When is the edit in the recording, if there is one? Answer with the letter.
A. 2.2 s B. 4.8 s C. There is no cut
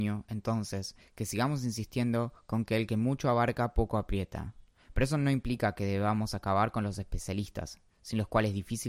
B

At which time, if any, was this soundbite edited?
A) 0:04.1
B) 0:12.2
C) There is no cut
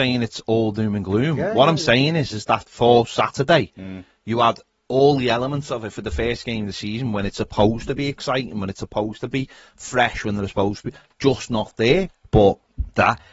B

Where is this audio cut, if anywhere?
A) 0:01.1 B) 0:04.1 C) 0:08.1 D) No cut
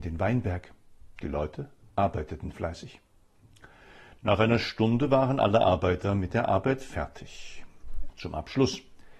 C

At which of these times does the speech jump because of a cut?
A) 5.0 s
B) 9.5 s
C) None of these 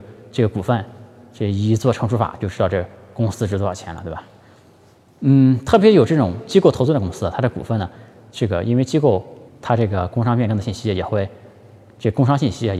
B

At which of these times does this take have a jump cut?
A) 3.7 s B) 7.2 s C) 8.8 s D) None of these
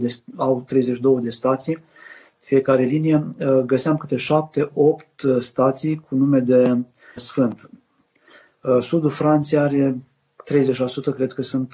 B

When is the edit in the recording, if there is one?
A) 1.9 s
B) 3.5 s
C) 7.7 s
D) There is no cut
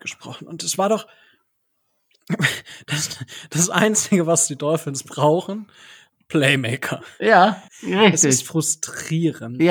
C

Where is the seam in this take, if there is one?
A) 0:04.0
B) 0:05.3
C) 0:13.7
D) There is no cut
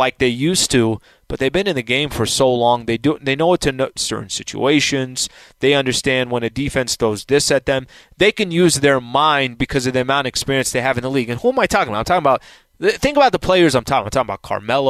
A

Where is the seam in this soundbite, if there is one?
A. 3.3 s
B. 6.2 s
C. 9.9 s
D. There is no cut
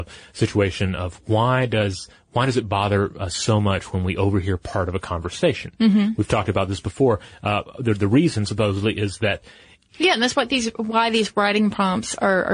C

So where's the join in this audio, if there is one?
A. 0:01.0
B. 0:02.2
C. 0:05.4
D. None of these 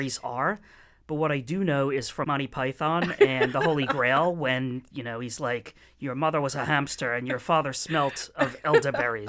B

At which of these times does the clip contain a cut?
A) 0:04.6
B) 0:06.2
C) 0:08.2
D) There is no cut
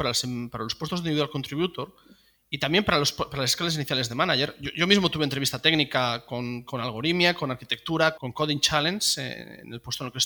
C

